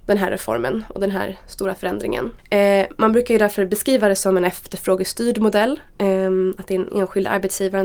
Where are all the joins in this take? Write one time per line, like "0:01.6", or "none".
0:02.4